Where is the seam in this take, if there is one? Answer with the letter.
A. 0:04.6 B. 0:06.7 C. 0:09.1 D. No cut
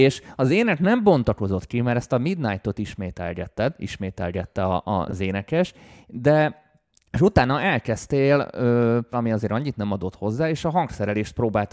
C